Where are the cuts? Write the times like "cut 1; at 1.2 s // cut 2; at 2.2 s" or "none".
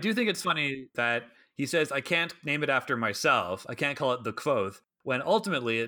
cut 1; at 0.9 s